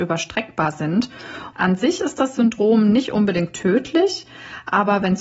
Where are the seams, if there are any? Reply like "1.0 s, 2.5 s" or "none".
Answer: 1.5 s